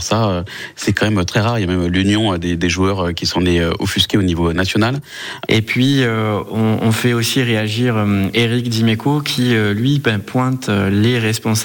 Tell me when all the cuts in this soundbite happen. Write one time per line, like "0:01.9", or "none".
0:05.5